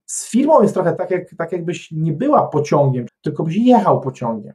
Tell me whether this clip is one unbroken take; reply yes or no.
no